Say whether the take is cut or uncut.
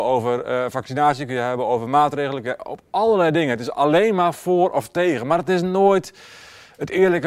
uncut